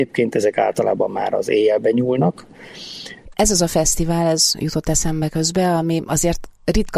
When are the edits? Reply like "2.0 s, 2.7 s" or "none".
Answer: 3.2 s